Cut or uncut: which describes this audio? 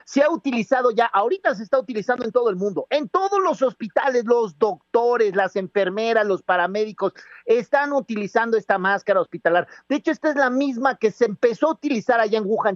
uncut